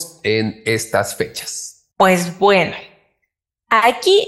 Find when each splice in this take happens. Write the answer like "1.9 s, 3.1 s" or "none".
1.9 s

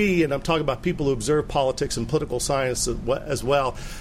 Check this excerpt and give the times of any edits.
none

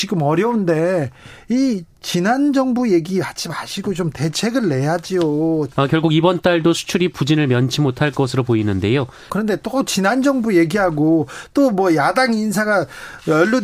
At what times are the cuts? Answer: 5.7 s, 9.3 s

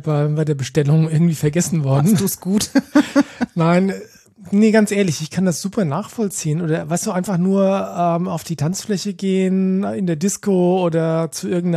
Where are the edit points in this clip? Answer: none

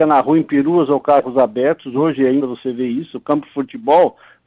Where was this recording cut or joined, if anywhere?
2.4 s

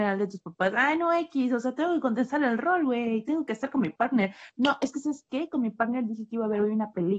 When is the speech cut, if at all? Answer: none

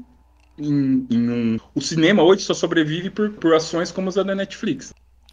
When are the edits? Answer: 1.6 s, 3.4 s

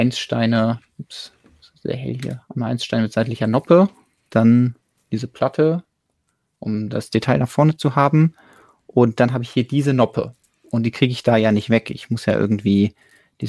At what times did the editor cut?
none

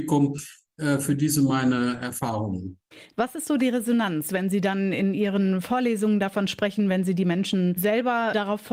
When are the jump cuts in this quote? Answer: 3.1 s

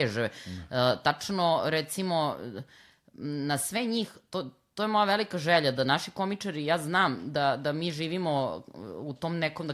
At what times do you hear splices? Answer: none

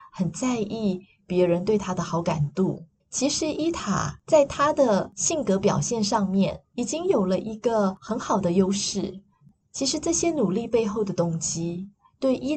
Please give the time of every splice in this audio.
3.0 s

